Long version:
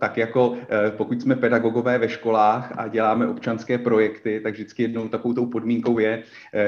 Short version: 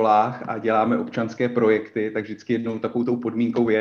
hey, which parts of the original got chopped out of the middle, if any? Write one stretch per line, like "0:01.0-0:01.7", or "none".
none